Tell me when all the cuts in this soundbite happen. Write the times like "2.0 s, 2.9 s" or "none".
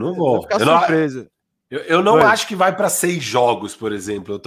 none